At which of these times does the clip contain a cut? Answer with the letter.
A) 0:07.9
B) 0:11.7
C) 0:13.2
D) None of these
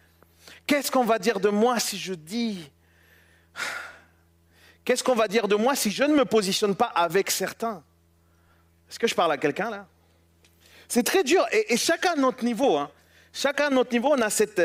D